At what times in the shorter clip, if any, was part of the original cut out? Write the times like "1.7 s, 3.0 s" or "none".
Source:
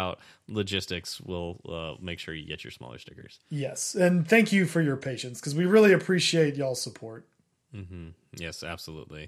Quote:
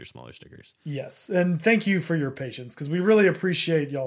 none